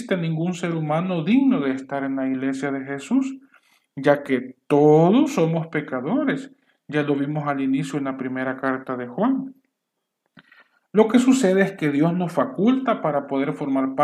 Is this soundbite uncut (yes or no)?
yes